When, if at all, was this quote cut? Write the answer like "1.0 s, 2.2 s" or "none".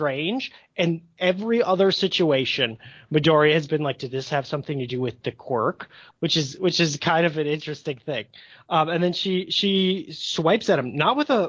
6.1 s